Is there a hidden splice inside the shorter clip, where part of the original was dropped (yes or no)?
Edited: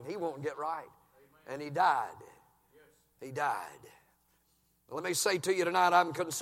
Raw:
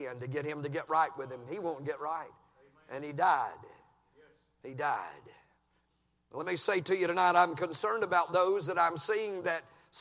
no